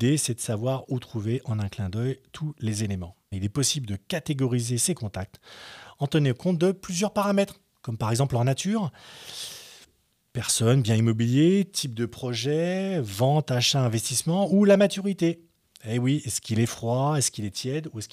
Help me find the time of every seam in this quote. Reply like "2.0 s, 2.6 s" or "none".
3.3 s